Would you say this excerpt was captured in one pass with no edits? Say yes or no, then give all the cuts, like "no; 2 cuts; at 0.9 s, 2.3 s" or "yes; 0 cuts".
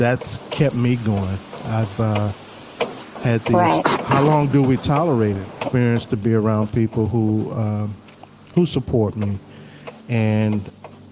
no; 2 cuts; at 3.8 s, 5.6 s